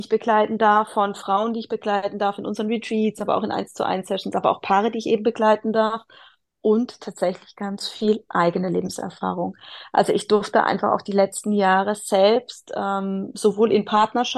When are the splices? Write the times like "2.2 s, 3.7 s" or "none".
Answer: none